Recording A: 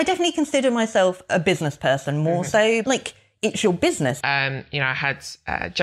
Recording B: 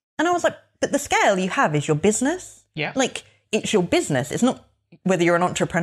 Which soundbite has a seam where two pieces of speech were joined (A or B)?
A